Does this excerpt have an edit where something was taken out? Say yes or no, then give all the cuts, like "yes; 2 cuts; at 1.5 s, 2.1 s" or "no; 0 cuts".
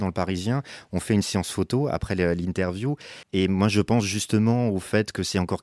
yes; 1 cut; at 3.2 s